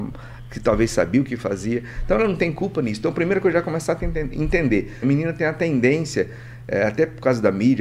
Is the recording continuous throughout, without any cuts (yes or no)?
no